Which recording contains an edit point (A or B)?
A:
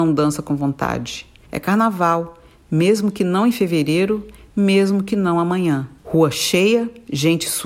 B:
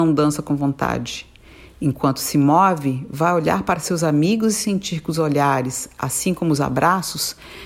A